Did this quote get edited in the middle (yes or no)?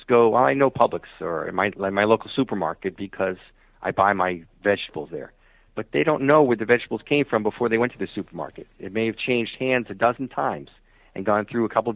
yes